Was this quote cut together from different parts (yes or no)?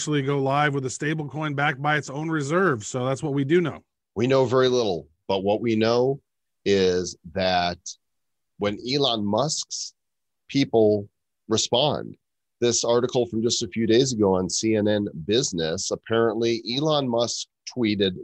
no